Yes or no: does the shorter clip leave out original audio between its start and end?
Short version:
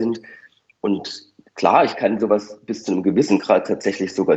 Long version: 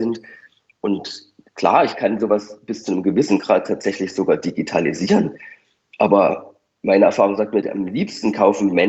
no